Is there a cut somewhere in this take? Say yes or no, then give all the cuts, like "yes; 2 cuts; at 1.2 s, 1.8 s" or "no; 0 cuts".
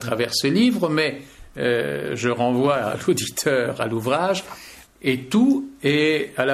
yes; 1 cut; at 4.8 s